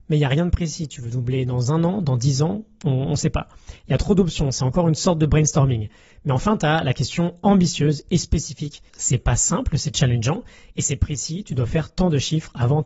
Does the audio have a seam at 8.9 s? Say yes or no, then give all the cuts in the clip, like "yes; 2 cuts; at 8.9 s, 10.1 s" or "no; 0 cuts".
yes; 1 cut; at 8.9 s